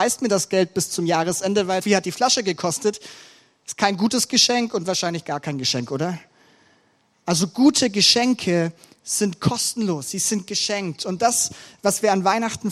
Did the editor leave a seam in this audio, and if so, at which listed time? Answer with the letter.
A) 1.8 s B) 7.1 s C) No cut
A